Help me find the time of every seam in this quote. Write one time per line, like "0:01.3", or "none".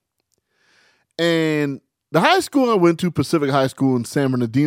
none